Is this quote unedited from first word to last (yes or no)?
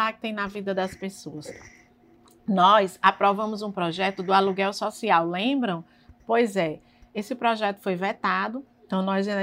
no